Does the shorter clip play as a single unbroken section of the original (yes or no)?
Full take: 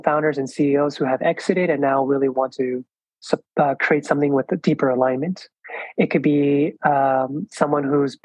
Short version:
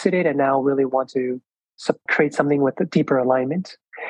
no